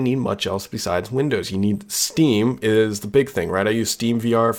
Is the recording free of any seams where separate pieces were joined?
yes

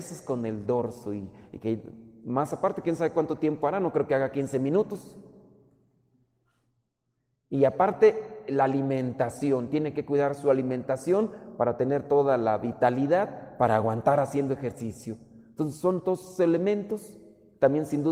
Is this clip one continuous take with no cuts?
yes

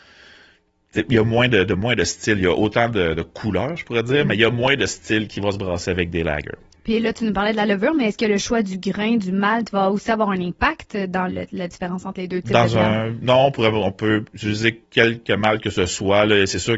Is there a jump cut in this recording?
yes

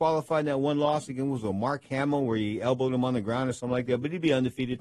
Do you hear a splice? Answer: no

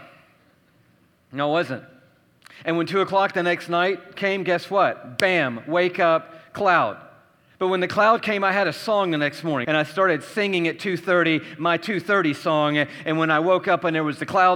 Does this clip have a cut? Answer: yes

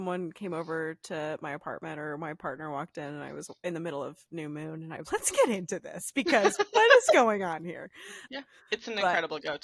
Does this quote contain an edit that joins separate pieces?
yes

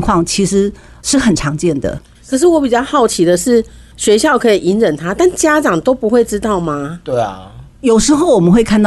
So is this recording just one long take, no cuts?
yes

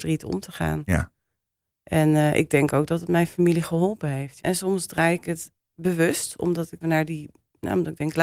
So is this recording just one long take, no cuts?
no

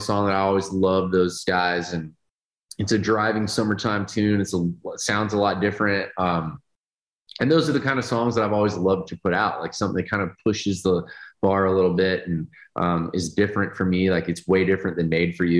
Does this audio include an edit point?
no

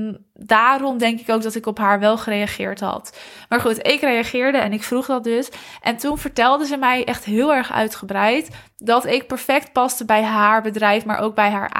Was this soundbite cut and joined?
no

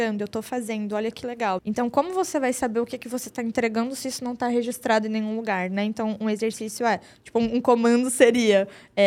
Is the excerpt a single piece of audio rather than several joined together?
no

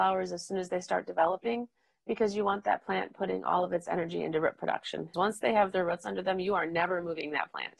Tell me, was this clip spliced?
yes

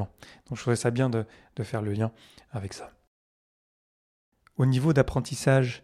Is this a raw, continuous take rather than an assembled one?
yes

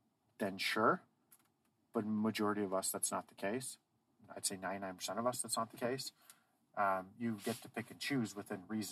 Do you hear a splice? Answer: no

